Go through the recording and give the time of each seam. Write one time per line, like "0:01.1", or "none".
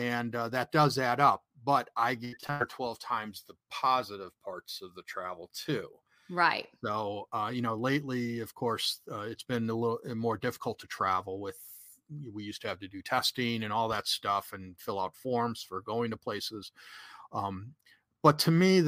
none